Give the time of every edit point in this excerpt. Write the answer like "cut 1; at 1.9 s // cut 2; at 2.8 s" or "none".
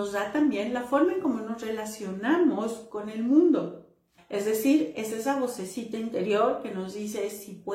cut 1; at 4.2 s